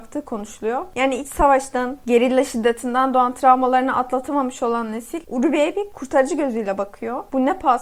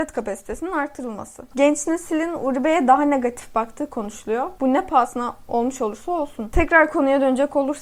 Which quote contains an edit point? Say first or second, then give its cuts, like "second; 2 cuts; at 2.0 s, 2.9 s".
second; 3 cuts; at 1.5 s, 4.6 s, 6.5 s